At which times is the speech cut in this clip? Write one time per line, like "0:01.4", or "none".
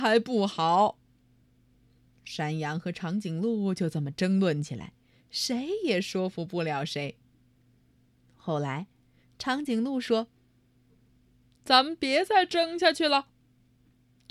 none